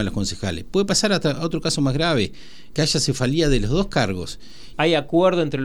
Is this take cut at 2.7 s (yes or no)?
yes